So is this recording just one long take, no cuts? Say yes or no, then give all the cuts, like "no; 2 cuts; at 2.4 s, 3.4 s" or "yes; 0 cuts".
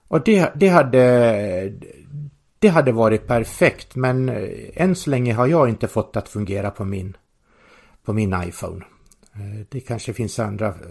yes; 0 cuts